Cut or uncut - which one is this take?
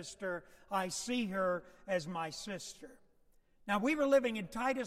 uncut